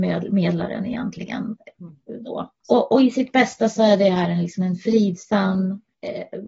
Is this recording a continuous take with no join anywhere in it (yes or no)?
yes